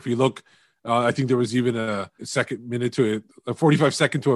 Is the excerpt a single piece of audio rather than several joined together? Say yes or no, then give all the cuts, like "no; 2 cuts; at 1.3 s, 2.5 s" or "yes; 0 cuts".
no; 1 cut; at 2.2 s